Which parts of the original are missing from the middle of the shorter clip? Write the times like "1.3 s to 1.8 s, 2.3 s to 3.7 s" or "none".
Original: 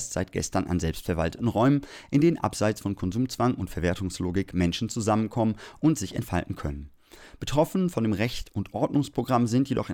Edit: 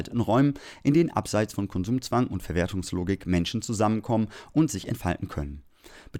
none